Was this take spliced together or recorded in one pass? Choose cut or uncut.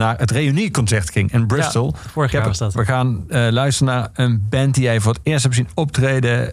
cut